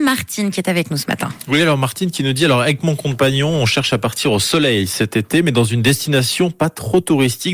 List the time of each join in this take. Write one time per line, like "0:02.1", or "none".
none